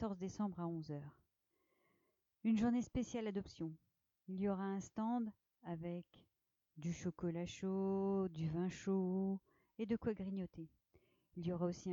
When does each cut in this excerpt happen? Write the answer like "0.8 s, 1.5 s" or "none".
none

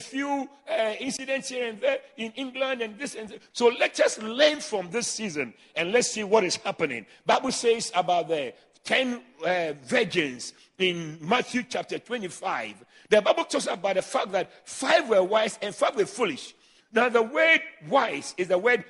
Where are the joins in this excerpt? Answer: 3.5 s

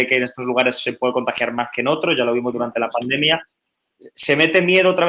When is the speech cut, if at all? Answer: none

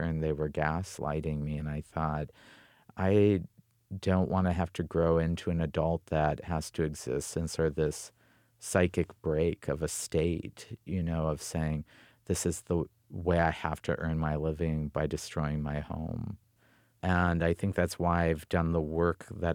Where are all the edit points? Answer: none

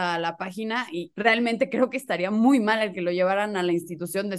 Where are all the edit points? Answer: 1.1 s

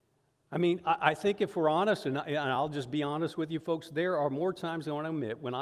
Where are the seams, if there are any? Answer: none

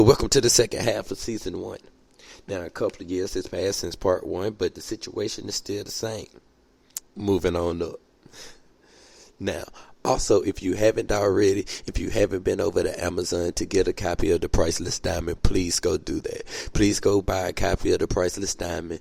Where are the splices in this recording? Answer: 7.0 s

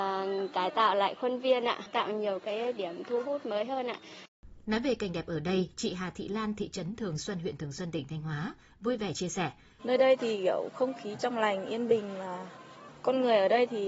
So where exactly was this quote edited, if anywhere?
9.8 s

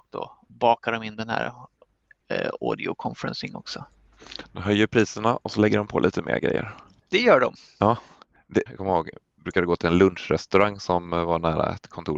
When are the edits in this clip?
8.7 s

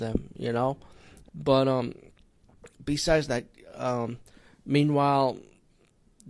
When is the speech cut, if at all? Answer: 1.3 s

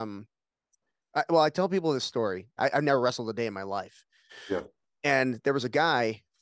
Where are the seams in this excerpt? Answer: 2.6 s

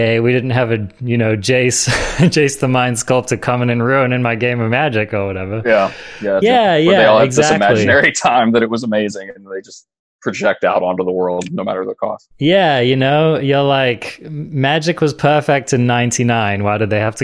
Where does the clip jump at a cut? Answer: 6.4 s

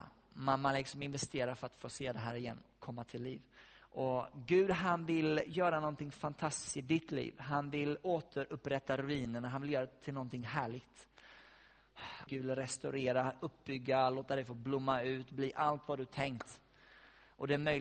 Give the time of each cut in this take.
12.3 s

